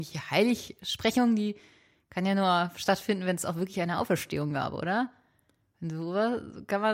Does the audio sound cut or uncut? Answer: uncut